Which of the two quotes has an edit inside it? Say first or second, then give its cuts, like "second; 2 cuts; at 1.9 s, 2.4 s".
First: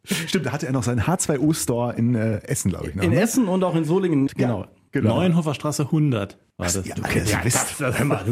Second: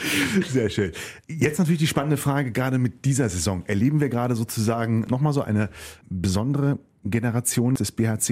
first; 1 cut; at 4.3 s